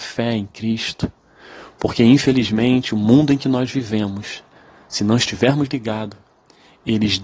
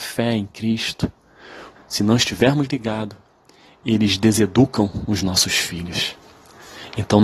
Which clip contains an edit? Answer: second; 1 cut; at 1.7 s

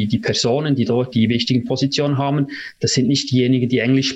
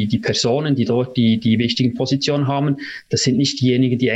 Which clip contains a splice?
first; 1 cut; at 1.1 s

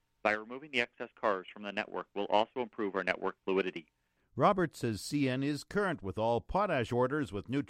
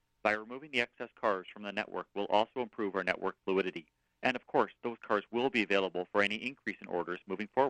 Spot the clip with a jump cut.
first; 1 cut; at 4.2 s

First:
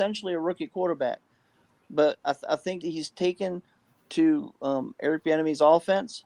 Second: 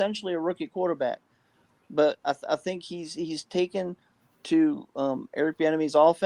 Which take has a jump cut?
first; 1 cut; at 2.8 s

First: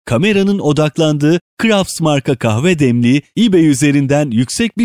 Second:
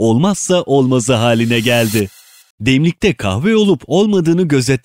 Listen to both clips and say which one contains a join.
second; 1 cut; at 2.5 s

